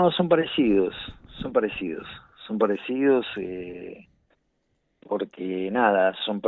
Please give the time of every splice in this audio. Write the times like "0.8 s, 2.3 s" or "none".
none